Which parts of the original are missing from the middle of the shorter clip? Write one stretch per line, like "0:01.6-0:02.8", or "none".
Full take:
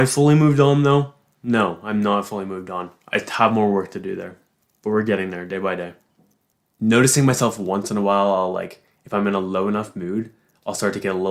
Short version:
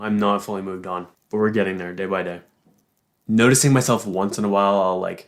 0:03.0-0:04.7

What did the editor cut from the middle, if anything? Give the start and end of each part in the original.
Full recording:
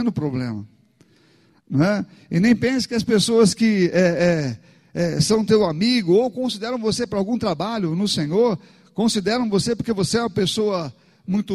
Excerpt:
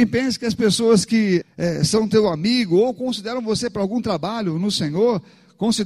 0:03.9-0:04.8

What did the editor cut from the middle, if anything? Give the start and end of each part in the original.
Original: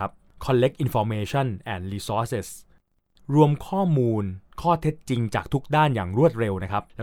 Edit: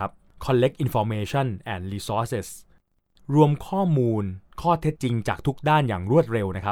0:05.0-0:05.0

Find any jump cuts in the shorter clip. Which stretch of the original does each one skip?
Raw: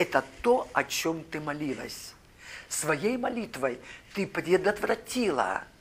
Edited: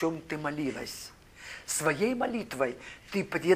none

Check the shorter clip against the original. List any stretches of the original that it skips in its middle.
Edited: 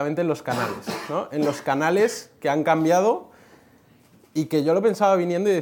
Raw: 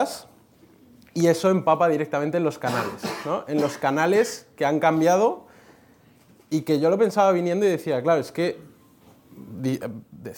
none

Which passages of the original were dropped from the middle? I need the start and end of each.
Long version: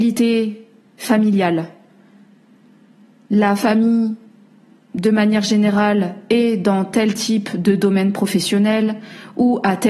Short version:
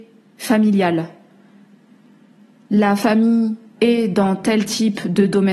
0:04.4-0:06.2

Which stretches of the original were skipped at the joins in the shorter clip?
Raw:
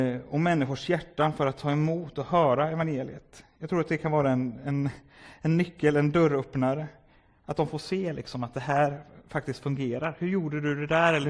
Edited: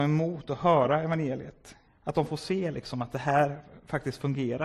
0:03.5-0:07.3

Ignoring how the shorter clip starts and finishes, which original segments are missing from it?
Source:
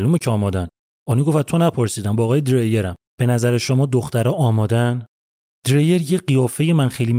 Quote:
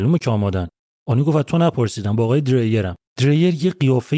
0:03.1-0:05.5

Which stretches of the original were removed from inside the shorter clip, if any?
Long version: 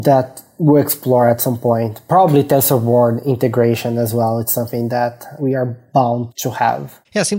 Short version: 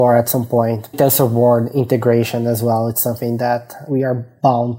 0:02.1-0:02.4

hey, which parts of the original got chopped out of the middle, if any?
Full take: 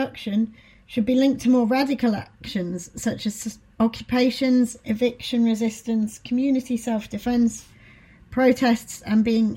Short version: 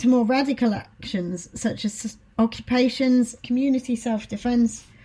0:04.8-0:06.2

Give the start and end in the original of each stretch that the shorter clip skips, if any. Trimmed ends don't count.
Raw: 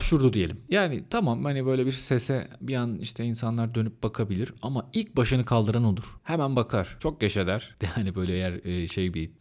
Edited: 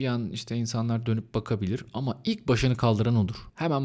none

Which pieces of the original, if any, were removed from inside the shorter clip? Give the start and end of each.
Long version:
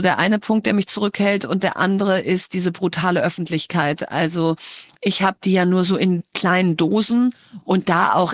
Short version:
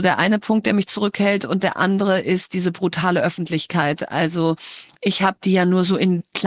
none

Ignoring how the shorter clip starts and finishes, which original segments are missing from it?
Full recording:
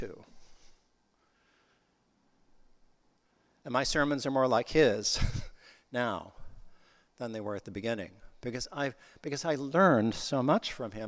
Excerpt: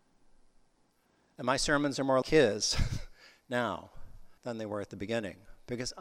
0:04.5-0:04.6
0:06.8-0:07.1

